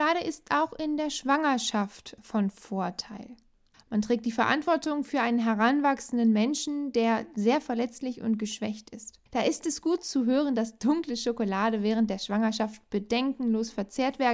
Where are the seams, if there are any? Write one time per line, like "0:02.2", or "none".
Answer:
0:03.7
0:09.3

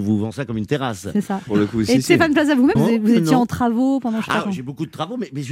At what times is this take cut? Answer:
0:01.5
0:02.8

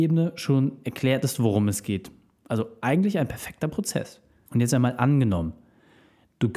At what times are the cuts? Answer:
none

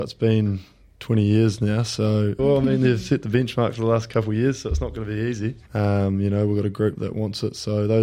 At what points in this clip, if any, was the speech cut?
0:02.4
0:05.7
0:06.9

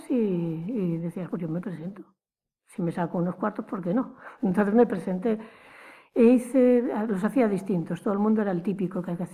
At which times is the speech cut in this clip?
0:01.3

